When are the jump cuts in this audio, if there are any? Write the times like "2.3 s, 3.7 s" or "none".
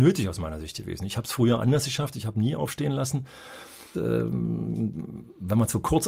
3.9 s